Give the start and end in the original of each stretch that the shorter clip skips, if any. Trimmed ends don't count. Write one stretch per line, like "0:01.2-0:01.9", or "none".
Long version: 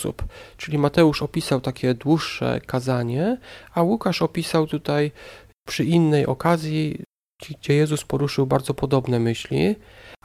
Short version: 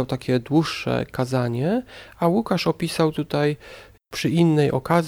none